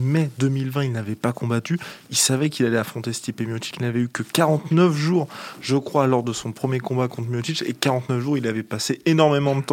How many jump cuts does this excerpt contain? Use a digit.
1